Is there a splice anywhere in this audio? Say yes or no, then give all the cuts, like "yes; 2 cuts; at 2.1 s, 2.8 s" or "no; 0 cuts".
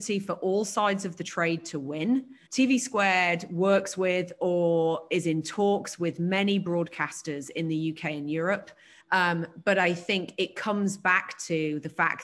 yes; 2 cuts; at 2.5 s, 9.0 s